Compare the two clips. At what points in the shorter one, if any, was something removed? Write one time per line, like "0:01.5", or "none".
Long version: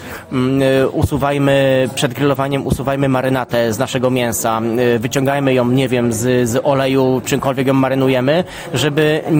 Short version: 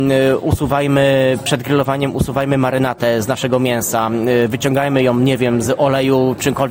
0:05.6

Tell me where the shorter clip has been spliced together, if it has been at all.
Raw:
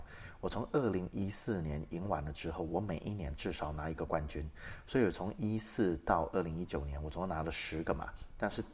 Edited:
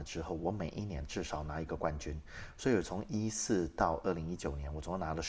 none

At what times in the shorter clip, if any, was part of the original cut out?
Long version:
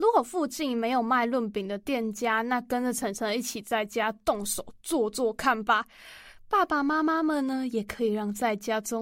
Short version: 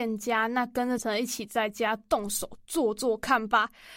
0:01.0

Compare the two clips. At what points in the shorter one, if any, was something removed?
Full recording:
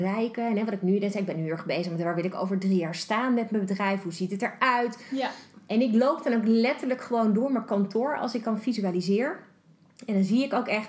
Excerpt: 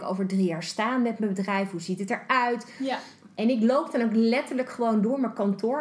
none

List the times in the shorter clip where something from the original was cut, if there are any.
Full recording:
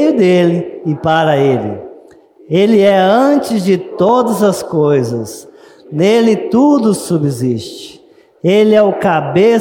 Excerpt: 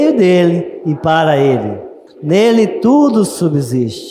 0:02.1

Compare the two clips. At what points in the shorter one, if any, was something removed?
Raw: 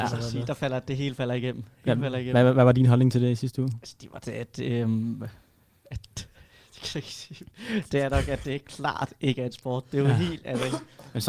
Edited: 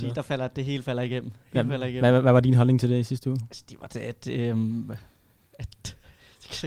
none

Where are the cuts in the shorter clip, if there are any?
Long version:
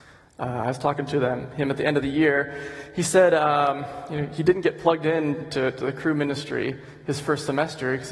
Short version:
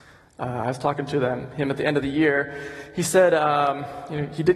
none

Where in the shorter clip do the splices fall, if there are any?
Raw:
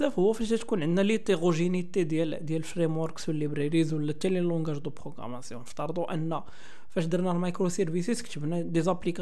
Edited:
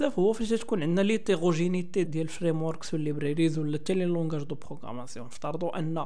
0:02.0

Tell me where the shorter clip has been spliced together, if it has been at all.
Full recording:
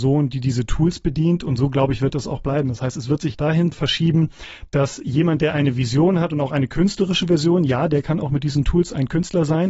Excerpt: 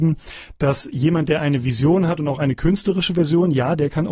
none

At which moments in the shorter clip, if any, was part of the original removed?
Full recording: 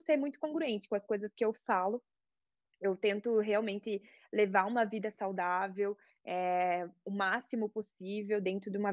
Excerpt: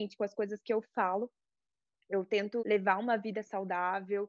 0:02.6

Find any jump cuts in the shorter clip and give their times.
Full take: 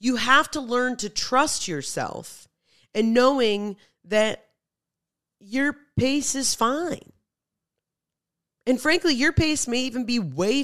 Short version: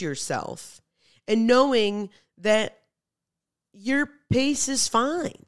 none

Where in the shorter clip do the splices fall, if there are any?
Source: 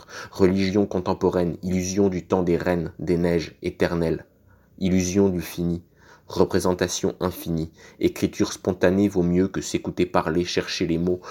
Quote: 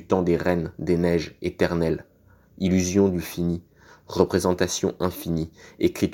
none

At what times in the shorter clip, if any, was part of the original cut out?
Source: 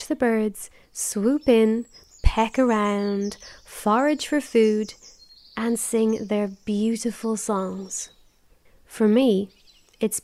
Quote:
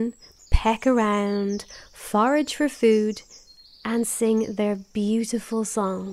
none

